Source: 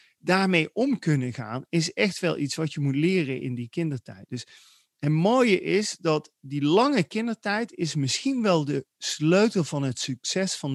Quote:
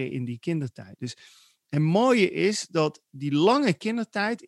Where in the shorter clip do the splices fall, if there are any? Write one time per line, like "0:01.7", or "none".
none